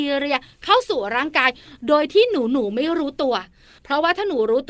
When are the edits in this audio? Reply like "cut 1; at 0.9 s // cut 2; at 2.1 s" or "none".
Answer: none

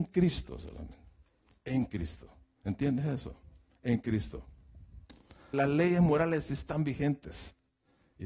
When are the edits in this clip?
cut 1; at 5.5 s

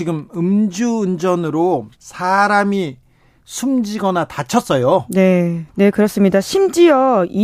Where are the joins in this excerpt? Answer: cut 1; at 1.9 s // cut 2; at 5.7 s

